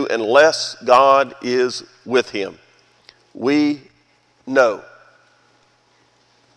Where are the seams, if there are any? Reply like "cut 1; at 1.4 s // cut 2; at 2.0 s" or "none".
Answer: none